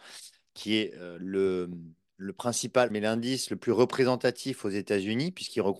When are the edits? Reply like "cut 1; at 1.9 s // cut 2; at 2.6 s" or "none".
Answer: cut 1; at 2.9 s